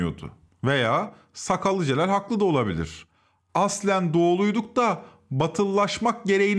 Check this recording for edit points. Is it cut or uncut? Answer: uncut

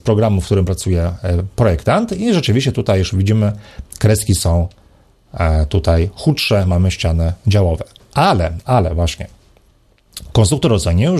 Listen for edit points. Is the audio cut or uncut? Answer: uncut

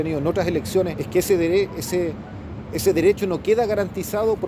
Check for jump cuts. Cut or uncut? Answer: cut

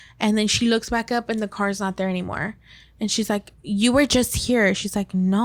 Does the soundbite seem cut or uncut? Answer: uncut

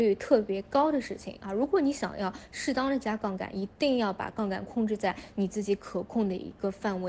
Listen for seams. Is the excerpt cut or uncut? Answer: uncut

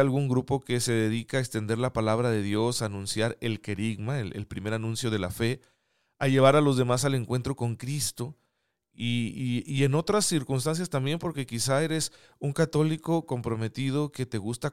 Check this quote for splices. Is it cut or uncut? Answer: uncut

